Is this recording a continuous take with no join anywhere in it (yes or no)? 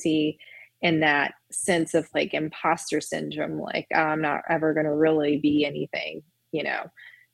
yes